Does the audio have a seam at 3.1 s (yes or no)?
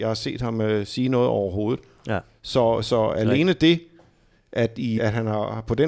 no